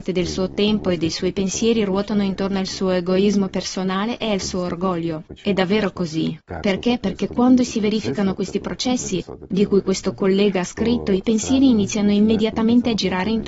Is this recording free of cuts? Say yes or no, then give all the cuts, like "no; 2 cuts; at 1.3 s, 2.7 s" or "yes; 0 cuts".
yes; 0 cuts